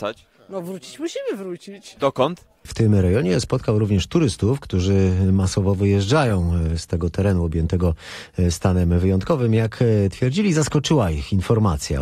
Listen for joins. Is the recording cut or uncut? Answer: cut